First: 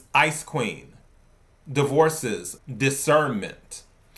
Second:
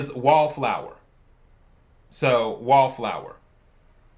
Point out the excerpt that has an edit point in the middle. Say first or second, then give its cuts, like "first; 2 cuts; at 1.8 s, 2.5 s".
first; 1 cut; at 2.6 s